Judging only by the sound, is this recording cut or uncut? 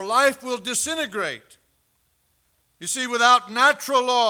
uncut